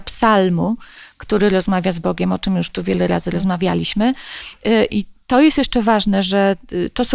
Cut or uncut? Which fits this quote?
cut